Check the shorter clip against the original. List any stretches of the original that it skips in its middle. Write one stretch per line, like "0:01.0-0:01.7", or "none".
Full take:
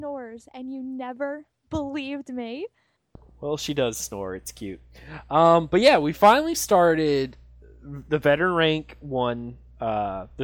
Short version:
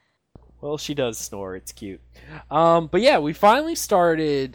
none

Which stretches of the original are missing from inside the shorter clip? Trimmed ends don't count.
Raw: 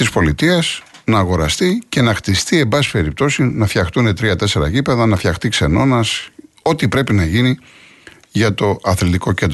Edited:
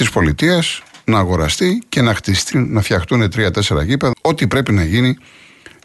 0:02.5-0:03.4
0:05.0-0:06.5

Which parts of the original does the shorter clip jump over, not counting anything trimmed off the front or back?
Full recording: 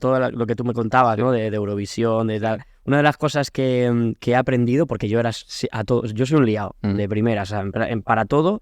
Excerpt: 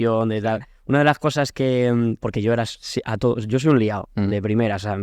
0:04.2-0:04.9

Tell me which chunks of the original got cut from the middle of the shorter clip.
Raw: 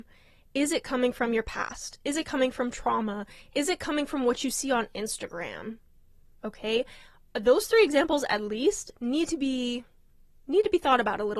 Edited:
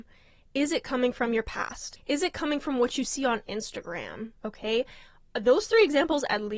0:02.0-0:03.4
0:05.8-0:06.4

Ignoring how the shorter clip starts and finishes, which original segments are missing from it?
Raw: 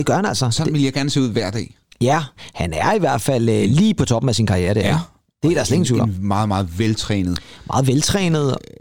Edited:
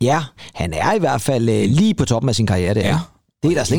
none

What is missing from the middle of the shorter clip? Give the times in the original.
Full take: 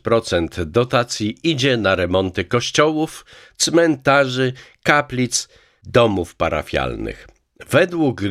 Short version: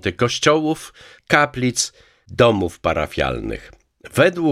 0:03.5-0:04.7

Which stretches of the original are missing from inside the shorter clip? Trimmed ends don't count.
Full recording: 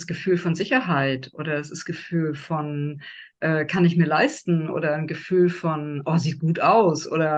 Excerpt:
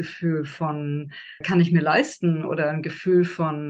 0:03.3-0:03.7

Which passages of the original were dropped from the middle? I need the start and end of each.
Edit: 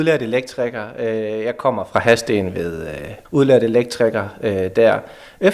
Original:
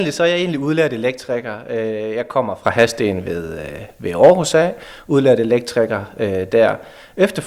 0:04.0-0:05.0

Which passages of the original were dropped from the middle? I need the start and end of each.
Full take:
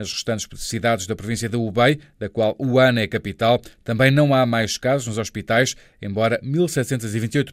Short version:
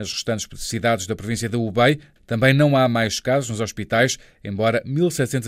0:02.2-0:03.7

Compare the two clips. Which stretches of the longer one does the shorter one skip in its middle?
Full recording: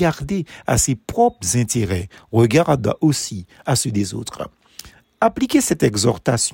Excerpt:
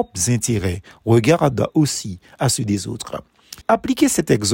0:04.9-0:05.1

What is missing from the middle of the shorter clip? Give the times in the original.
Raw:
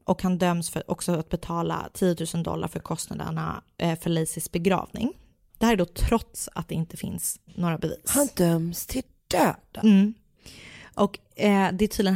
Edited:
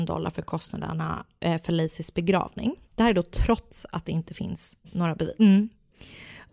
0:05.2-0:05.5
0:08.0-0:09.8

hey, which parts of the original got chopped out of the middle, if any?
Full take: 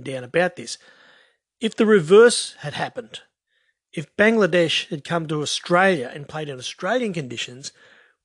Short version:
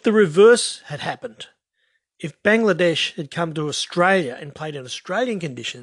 none

